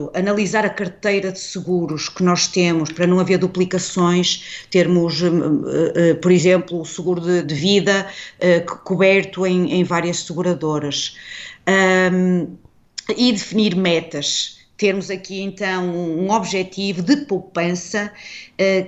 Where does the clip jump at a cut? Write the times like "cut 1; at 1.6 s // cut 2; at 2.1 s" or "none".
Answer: cut 1; at 7.4 s